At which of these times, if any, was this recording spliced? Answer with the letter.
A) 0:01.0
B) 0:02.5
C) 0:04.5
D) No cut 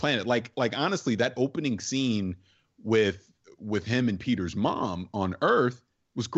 D